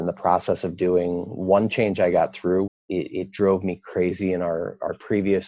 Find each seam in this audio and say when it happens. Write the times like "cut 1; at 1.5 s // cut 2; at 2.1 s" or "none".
cut 1; at 2.7 s